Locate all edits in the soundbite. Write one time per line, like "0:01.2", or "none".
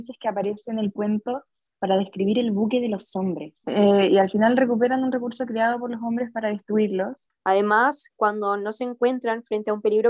0:03.6
0:07.3

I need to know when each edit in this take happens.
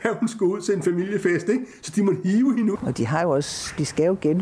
0:02.8

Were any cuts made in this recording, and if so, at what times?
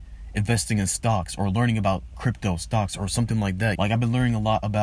0:03.7

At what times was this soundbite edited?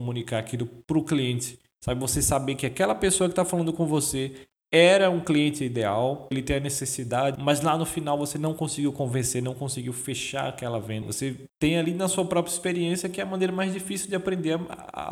0:06.3
0:07.4
0:11.0

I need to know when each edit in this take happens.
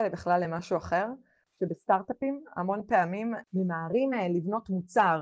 none

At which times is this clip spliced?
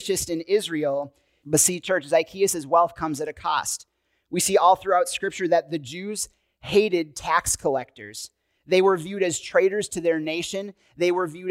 0:01.4

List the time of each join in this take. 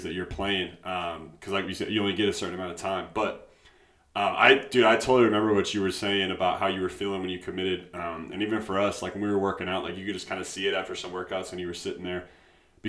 none

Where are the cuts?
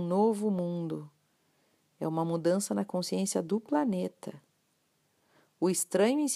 none

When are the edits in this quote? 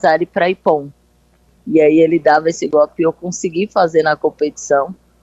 0:01.6

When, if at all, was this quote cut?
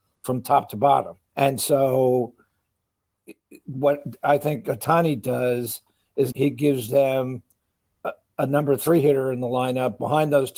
0:01.3
0:06.3

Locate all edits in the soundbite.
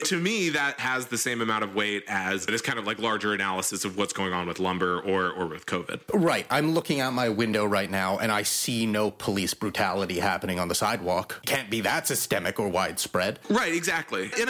none

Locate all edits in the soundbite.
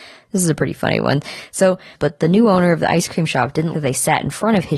0:01.9
0:03.7

